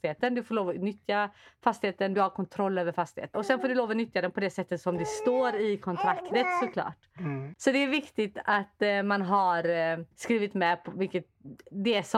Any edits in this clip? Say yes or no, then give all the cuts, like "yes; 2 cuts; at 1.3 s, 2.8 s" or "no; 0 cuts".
yes; 2 cuts; at 3.3 s, 10.1 s